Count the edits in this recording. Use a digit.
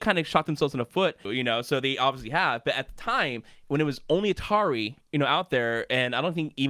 1